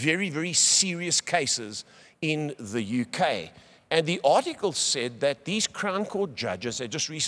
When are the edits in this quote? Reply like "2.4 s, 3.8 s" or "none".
none